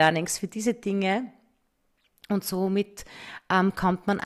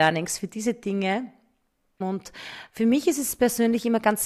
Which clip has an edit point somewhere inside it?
second; 1 cut; at 2.0 s

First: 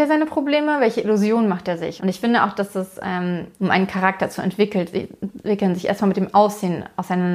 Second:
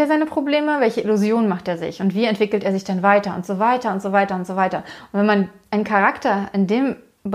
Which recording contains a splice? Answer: first; 2 cuts; at 2.0 s, 3.6 s

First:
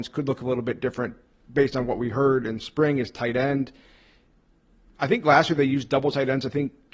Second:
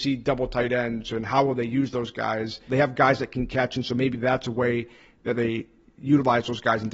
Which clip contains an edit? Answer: second; 1 cut; at 2.7 s

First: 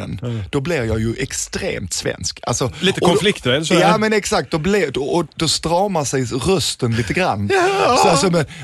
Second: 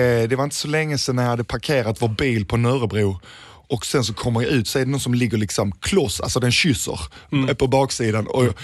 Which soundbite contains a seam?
first; 1 cut; at 5.3 s

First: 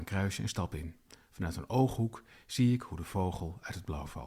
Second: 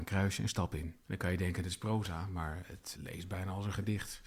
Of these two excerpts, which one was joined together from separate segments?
second; 2 cuts; at 1.0 s, 2.9 s

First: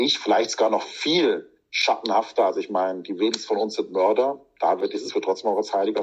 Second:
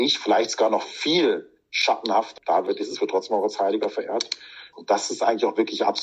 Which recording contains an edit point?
second; 2 cuts; at 2.4 s, 4.7 s

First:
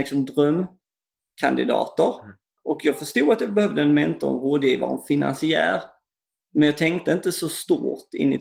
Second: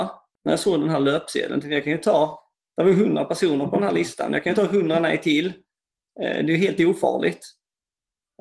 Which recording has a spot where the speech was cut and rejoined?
first; 1 cut; at 2.6 s

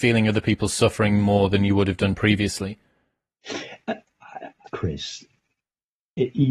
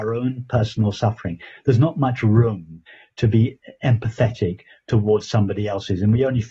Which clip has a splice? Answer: first; 1 cut; at 4.7 s

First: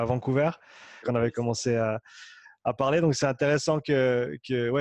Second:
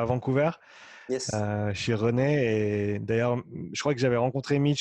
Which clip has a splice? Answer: first; 1 cut; at 1.0 s

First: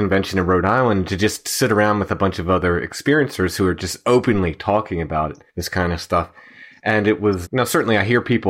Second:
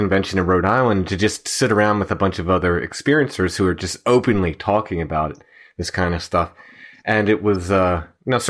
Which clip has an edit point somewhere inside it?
first; 2 cuts; at 5.5 s, 7.4 s

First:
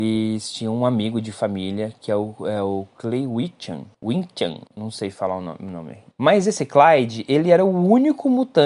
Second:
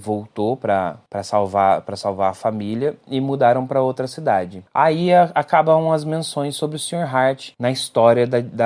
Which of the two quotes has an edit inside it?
first; 2 cuts; at 4.7 s, 6.1 s

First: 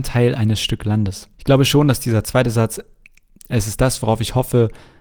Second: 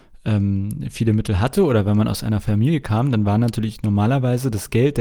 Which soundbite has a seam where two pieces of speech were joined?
first; 1 cut; at 1.3 s

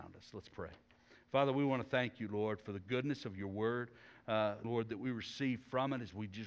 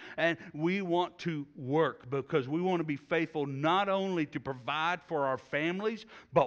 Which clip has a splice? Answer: first; 1 cut; at 4.6 s

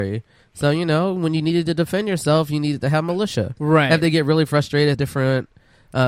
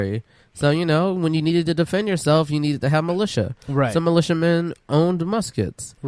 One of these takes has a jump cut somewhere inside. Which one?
first; 2 cuts; at 3.6 s, 4.9 s

